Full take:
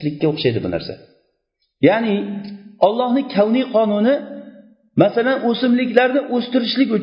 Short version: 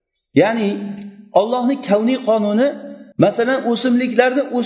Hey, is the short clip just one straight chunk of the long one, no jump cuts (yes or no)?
no